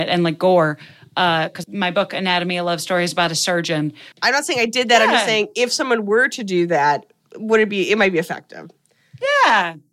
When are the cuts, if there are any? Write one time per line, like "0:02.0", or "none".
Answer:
0:01.6
0:04.1

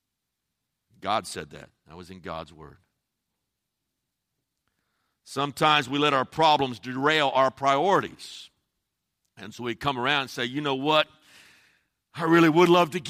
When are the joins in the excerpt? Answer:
none

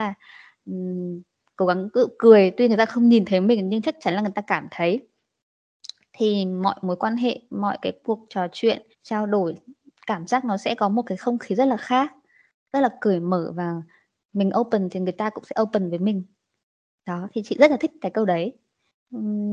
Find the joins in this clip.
0:08.9

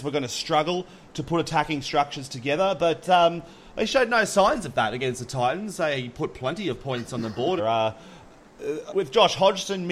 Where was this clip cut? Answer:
0:07.6
0:08.9

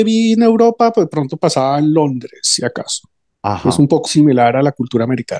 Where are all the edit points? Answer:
0:04.1

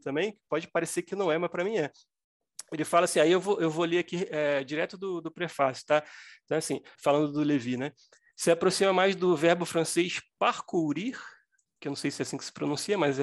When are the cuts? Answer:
0:06.9

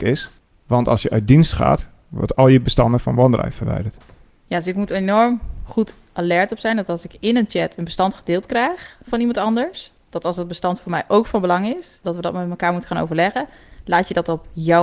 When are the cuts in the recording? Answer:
0:12.0

